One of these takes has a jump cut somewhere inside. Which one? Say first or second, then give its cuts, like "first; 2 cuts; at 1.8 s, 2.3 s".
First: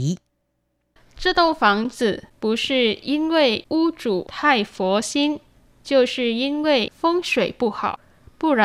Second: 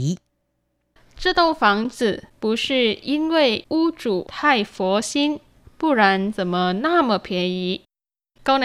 second; 1 cut; at 5.6 s